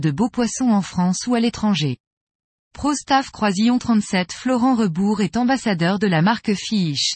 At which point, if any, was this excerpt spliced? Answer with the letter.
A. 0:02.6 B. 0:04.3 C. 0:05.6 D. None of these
A